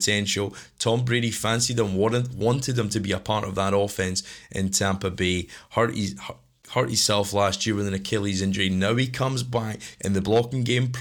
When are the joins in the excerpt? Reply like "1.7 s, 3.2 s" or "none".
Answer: 10.0 s